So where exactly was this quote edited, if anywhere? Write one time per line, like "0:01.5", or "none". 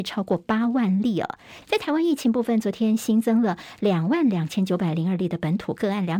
0:01.6